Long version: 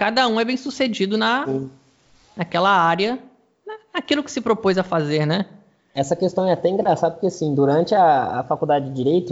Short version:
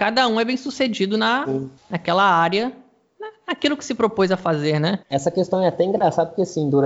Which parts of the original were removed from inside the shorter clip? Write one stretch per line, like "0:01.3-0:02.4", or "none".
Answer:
0:01.8-0:02.2
0:05.5-0:05.9